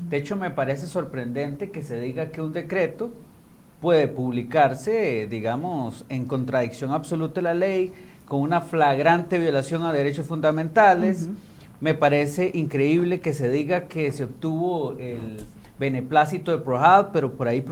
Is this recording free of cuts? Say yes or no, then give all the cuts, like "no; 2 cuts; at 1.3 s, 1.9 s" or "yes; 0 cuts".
yes; 0 cuts